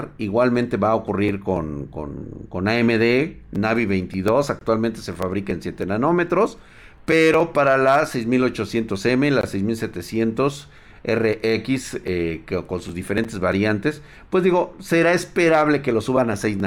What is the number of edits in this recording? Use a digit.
0